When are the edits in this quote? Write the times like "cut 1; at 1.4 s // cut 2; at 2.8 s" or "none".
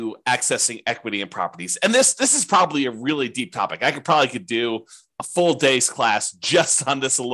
none